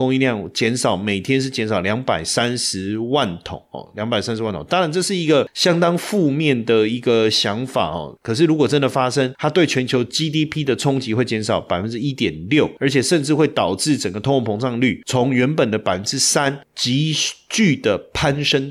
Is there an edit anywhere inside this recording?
no; 0 cuts

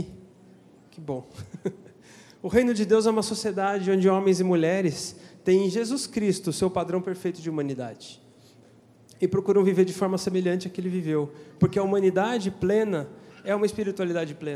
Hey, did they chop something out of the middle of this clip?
no; 0 cuts

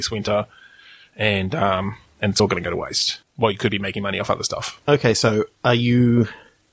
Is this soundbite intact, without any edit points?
no; 1 cut; at 3.2 s

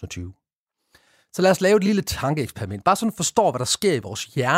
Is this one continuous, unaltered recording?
yes; 0 cuts

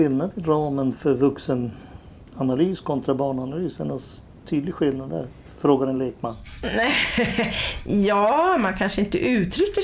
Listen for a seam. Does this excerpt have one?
no; 0 cuts

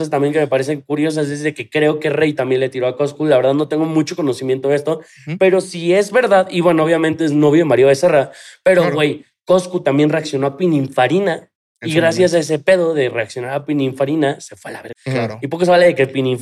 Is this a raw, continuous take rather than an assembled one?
no; 1 cut; at 15.0 s

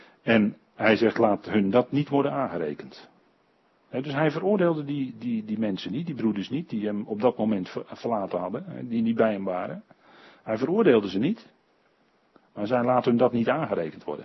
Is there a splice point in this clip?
no; 0 cuts

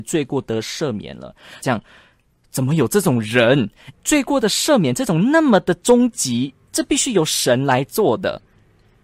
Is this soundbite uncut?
no; 3 cuts; at 1.6 s, 3.9 s, 6.6 s

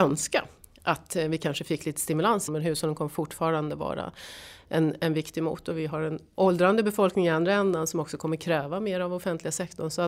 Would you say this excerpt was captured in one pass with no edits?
no; 2 cuts; at 2.5 s, 5.7 s

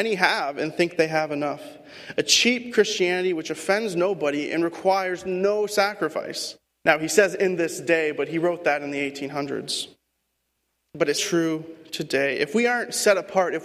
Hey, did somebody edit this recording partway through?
yes; 2 cuts; at 6.7 s, 11.2 s

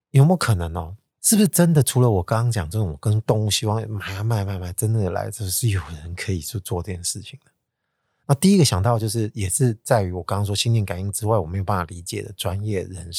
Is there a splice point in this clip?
no; 0 cuts

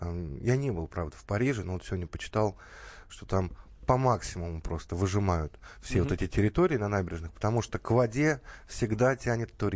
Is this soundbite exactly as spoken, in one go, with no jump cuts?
yes; 0 cuts

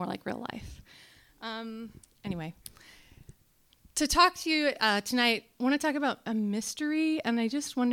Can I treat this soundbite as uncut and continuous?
yes; 0 cuts

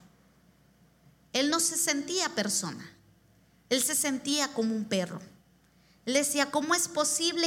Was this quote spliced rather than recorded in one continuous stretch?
yes; 1 cut; at 1.2 s

